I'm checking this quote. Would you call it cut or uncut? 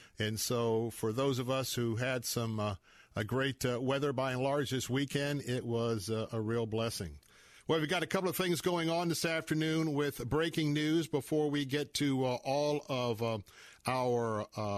uncut